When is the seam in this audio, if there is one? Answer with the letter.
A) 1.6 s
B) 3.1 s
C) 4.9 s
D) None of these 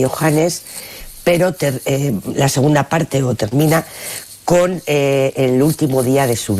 D